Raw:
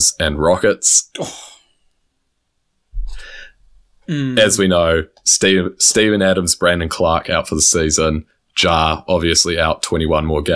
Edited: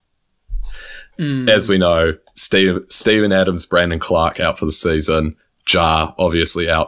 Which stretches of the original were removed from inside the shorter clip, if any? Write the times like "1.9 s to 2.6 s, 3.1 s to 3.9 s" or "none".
3.5 s to 4.0 s